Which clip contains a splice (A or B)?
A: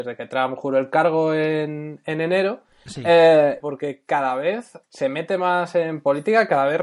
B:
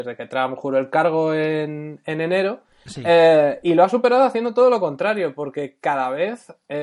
A